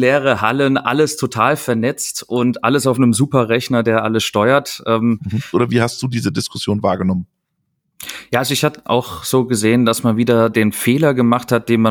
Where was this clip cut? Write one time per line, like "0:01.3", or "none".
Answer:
0:05.5